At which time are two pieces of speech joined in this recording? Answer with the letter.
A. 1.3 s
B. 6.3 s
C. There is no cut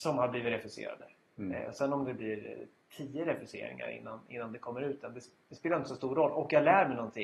A